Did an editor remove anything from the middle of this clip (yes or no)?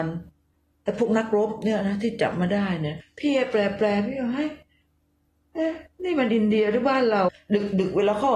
yes